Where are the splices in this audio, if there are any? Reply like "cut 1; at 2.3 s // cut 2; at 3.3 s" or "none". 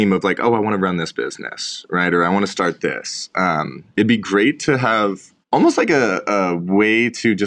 cut 1; at 5.4 s